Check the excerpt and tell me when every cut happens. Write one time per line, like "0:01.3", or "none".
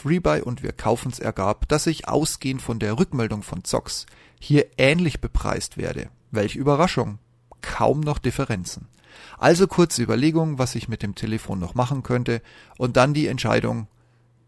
none